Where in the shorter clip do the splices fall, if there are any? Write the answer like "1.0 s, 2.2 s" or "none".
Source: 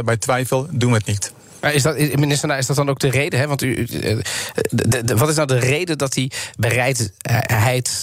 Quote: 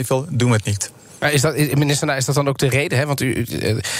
none